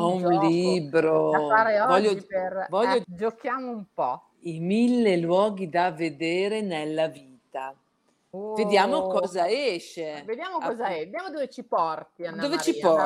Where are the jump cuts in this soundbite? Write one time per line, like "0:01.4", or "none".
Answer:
0:03.0